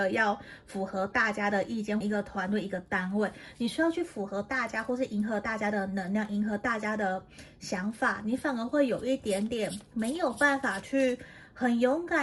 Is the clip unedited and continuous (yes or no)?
no